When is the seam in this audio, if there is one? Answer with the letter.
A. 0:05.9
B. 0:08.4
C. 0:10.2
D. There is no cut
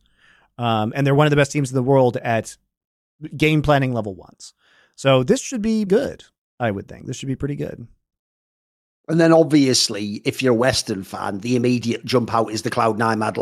A